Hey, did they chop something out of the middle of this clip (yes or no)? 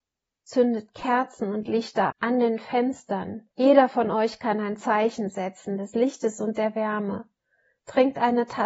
yes